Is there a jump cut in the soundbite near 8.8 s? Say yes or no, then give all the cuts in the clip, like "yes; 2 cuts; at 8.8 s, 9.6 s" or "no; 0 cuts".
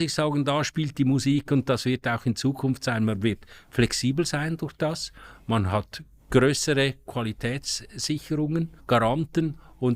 yes; 1 cut; at 8.8 s